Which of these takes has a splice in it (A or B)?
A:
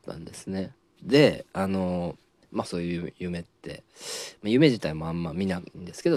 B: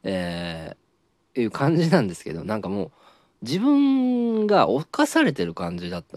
A